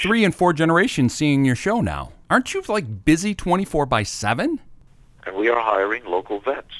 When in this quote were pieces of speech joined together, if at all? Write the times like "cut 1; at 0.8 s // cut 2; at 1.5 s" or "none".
cut 1; at 2.2 s // cut 2; at 5.2 s